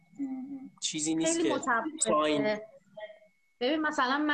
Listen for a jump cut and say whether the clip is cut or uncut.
uncut